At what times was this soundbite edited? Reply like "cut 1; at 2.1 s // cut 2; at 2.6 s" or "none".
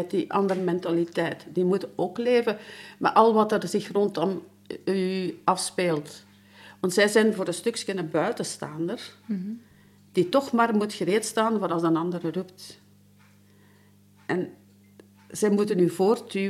none